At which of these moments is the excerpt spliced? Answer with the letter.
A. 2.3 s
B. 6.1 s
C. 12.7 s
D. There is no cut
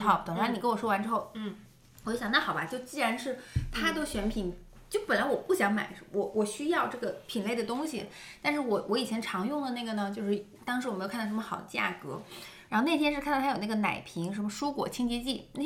C